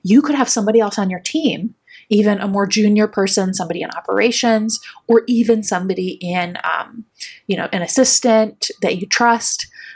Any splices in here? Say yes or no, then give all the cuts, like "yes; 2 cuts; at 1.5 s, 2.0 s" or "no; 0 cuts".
no; 0 cuts